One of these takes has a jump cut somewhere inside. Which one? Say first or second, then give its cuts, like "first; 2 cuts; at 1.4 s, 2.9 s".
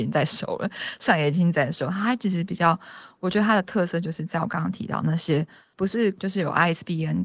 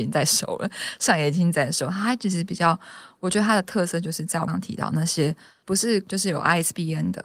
second; 1 cut; at 4.5 s